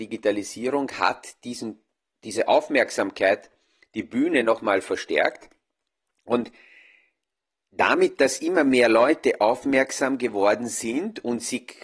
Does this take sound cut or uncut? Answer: uncut